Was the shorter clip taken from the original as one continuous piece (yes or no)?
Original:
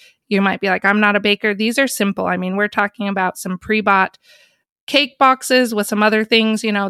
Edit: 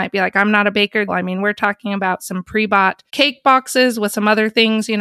no